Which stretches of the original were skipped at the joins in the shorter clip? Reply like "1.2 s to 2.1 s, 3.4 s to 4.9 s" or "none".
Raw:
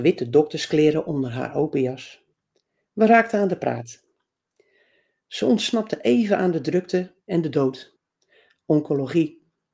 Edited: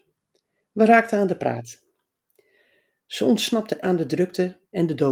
6.0 s to 6.4 s